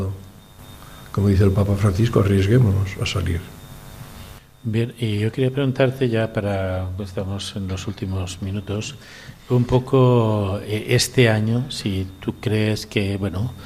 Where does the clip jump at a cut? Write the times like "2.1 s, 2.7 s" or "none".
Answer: none